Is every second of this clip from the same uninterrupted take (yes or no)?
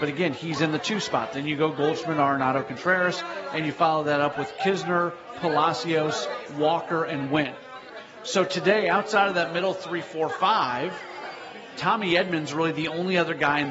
yes